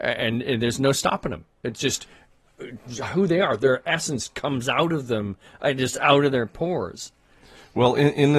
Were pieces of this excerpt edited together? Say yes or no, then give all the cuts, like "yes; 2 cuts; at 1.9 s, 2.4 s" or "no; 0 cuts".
no; 0 cuts